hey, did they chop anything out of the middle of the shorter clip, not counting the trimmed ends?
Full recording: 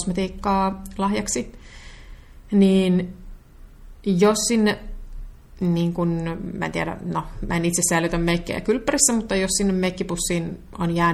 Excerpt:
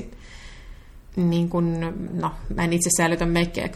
yes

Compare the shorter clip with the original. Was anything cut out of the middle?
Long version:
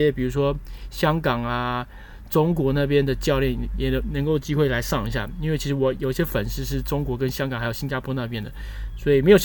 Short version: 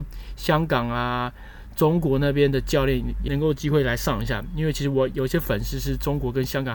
yes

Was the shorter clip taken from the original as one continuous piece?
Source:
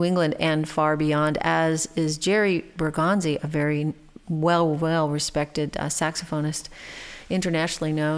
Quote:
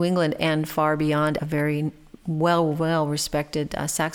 no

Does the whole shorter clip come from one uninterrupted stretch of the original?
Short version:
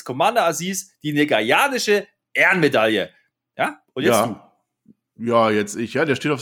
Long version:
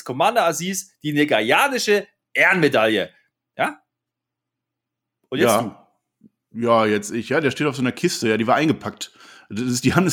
no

